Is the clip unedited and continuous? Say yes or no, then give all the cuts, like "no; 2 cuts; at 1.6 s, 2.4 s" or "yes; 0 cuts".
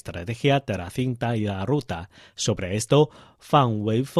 yes; 0 cuts